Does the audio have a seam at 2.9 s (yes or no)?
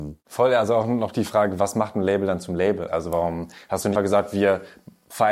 yes